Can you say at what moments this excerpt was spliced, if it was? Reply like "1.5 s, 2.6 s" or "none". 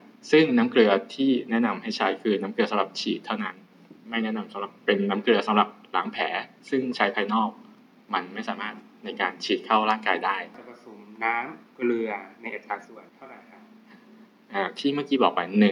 13.1 s